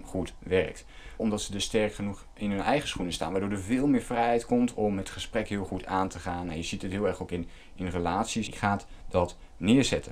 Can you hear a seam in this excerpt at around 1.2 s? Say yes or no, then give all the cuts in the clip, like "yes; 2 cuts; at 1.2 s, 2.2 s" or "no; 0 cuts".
yes; 2 cuts; at 1.2 s, 8.5 s